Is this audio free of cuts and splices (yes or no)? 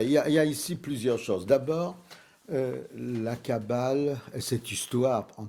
yes